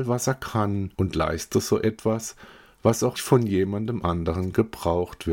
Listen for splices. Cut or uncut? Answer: cut